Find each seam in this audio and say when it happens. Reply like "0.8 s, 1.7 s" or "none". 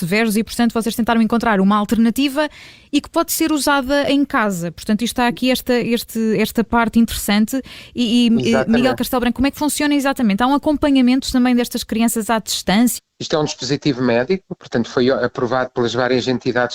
13.0 s